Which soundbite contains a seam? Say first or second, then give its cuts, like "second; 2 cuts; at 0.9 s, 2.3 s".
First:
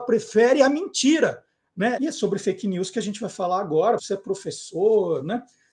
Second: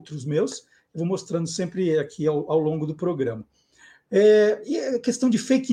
first; 2 cuts; at 2.0 s, 4.0 s